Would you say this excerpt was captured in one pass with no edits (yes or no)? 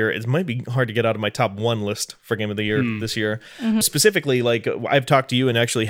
no